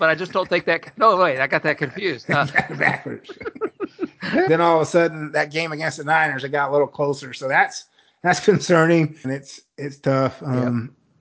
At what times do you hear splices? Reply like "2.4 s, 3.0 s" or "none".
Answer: 4.5 s, 9.2 s